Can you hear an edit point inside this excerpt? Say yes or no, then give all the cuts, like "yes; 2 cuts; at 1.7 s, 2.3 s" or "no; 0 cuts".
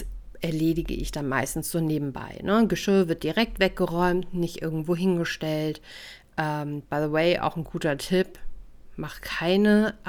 yes; 1 cut; at 6.8 s